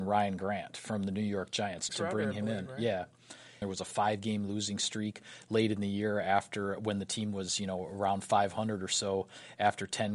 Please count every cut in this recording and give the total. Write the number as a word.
two